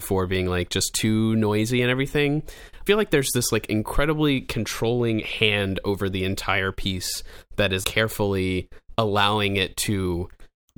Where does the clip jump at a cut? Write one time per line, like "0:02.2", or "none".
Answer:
0:02.9
0:07.8